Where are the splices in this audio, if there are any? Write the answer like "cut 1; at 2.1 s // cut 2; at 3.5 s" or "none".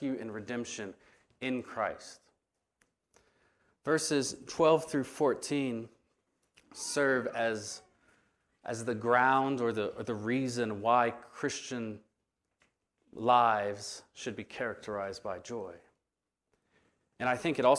none